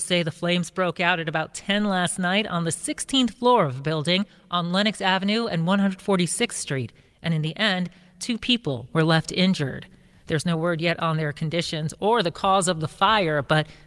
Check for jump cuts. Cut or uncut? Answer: uncut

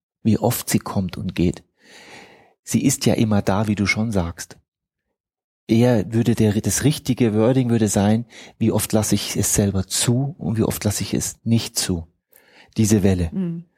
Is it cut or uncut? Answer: uncut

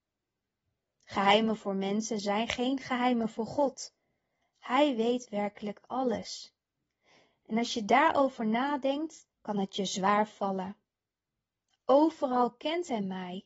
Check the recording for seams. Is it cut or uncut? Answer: cut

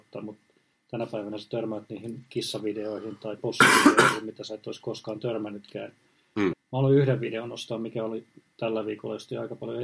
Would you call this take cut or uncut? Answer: cut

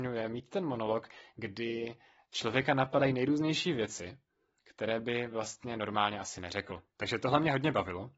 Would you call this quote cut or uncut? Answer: cut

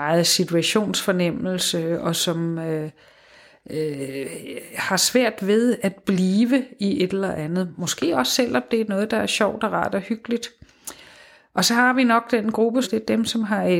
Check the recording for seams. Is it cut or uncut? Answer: cut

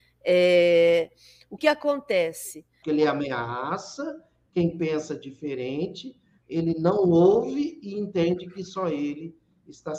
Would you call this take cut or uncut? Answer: cut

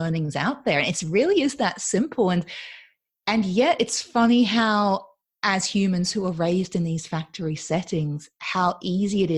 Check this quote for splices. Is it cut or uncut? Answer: uncut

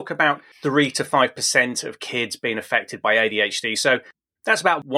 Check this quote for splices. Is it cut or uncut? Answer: uncut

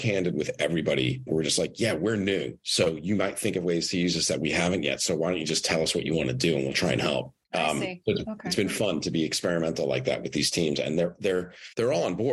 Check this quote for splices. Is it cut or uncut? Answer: uncut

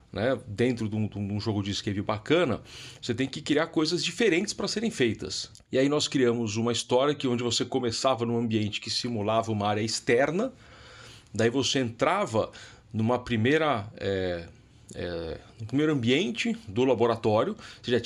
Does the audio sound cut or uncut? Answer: cut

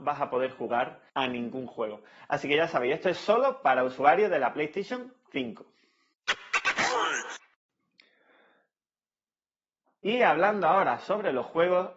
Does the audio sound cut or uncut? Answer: cut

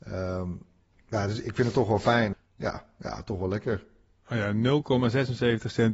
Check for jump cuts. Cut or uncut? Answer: cut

